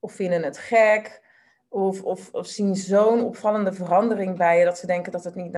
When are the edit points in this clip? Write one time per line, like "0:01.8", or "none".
none